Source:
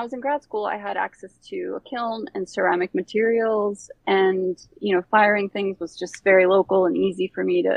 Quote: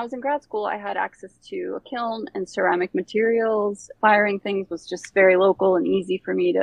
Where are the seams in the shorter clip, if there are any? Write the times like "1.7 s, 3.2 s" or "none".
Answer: 4.0 s